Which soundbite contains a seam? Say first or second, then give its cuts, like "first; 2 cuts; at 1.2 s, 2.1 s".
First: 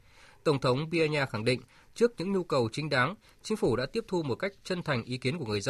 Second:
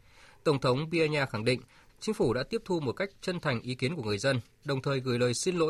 second; 1 cut; at 1.9 s